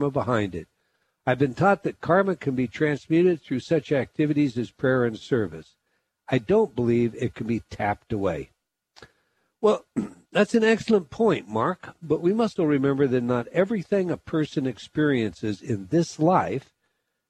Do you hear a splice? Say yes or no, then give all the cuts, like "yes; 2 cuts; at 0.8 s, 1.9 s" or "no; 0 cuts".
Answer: yes; 1 cut; at 12.6 s